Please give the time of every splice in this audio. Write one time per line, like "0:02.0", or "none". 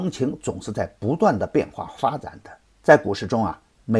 0:02.6

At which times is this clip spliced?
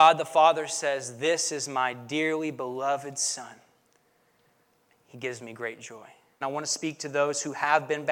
0:06.4

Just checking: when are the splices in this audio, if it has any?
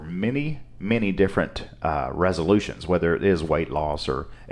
none

